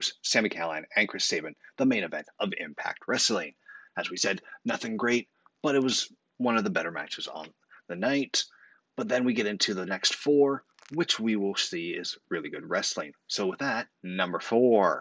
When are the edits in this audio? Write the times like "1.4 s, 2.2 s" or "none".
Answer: 13.9 s